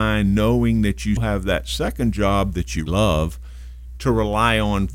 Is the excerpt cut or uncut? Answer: cut